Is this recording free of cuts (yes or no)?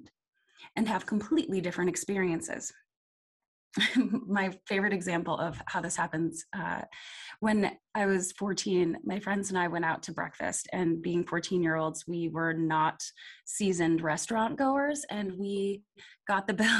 yes